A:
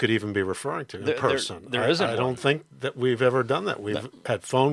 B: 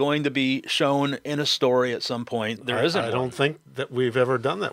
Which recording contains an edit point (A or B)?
B